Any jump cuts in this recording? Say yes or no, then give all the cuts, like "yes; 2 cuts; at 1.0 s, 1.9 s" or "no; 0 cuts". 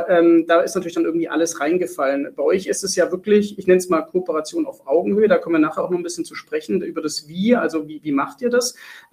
no; 0 cuts